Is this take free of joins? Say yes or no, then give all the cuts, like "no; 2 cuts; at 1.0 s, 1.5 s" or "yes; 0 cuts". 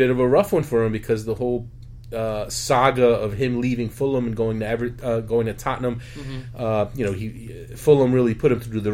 yes; 0 cuts